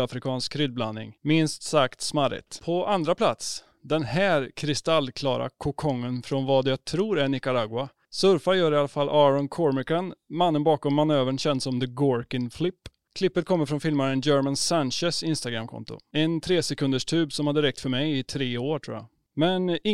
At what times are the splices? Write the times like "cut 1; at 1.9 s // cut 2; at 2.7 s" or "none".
none